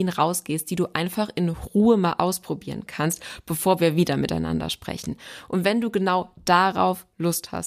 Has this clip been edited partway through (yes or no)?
no